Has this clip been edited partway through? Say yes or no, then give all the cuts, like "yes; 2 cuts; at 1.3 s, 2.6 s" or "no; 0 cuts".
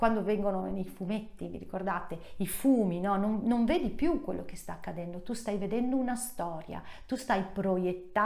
no; 0 cuts